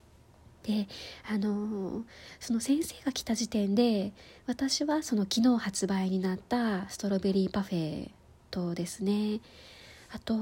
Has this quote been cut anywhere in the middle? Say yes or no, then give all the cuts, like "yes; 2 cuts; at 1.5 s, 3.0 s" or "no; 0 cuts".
no; 0 cuts